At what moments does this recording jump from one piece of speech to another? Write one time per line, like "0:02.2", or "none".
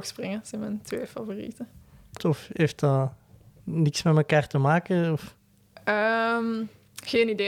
0:02.2